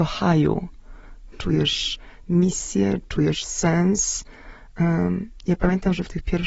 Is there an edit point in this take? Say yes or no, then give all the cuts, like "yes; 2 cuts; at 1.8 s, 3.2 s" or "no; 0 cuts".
yes; 1 cut; at 1.3 s